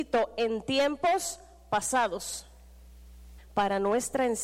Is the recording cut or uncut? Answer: cut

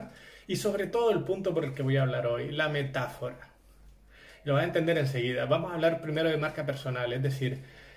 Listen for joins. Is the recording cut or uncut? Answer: uncut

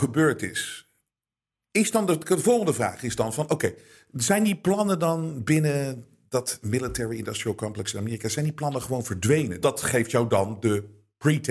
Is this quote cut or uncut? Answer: cut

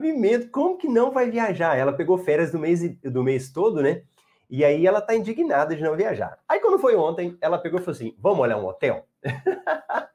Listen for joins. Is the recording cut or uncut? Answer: uncut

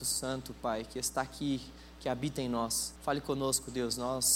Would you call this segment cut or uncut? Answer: cut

